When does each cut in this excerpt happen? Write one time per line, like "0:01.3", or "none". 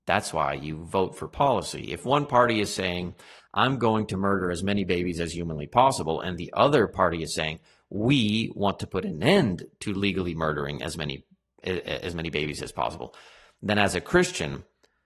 none